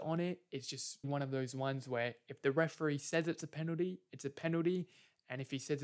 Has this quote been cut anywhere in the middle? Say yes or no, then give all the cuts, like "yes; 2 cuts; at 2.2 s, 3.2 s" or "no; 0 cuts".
yes; 1 cut; at 1.0 s